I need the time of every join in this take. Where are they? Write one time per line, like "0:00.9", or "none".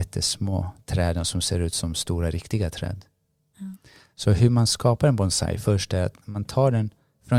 0:06.2